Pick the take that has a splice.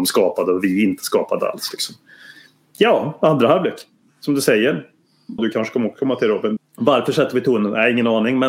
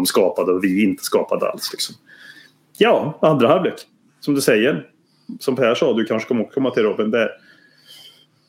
first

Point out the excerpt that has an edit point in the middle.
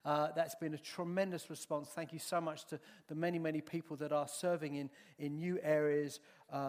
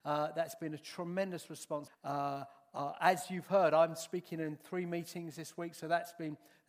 second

